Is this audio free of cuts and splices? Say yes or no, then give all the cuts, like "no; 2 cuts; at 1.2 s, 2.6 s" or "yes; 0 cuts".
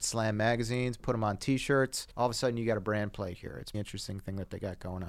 no; 2 cuts; at 2.1 s, 3.7 s